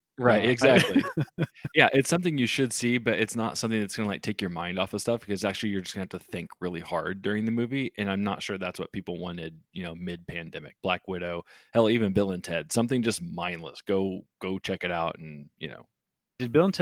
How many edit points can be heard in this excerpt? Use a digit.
1